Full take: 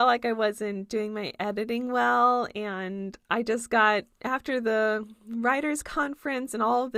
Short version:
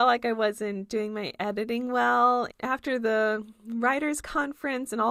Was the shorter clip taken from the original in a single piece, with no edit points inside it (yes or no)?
no